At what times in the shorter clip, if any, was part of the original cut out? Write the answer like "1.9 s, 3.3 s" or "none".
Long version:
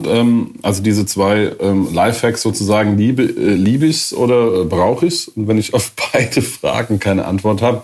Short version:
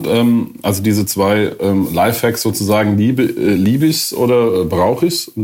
none